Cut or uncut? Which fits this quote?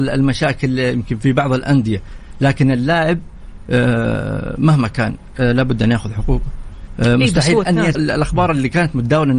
cut